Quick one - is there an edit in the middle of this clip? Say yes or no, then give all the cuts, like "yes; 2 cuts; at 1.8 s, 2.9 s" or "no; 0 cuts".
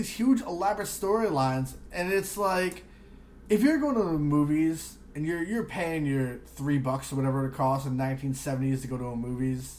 no; 0 cuts